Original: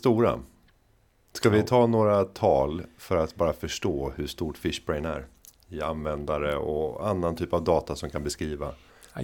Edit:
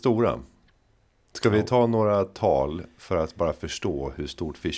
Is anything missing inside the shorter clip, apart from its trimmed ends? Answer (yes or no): no